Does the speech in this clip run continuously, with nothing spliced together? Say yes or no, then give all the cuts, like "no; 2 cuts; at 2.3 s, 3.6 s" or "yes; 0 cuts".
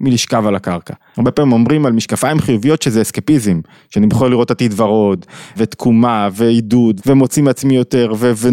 no; 3 cuts; at 1.1 s, 5.5 s, 7.0 s